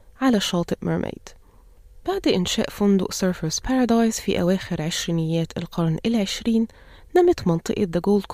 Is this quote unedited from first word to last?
yes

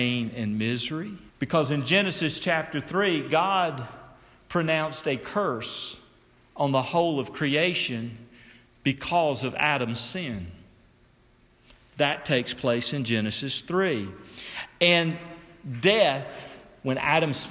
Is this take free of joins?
no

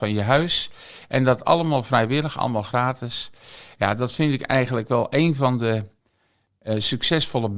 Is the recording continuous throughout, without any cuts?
yes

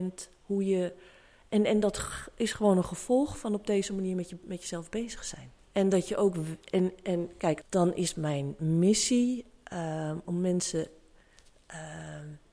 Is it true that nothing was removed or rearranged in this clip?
no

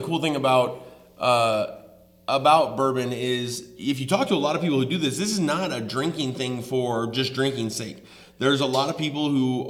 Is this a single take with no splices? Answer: yes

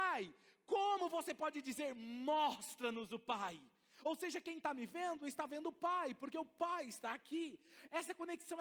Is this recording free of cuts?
yes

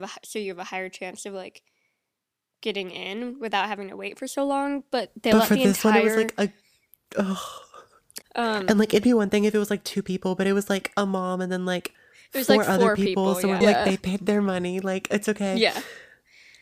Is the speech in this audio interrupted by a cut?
yes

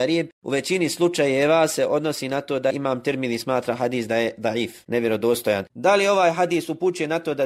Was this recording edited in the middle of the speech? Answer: yes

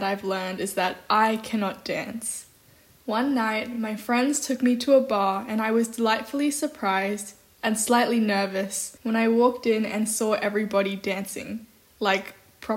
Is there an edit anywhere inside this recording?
no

